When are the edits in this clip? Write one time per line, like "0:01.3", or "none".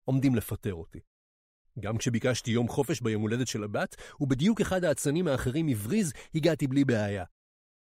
0:01.6